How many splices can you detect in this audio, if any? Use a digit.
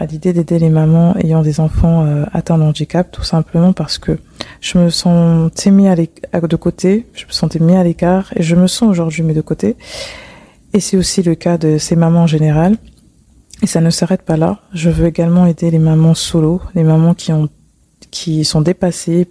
0